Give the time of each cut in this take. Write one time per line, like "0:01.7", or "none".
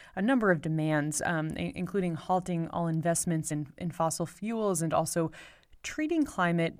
none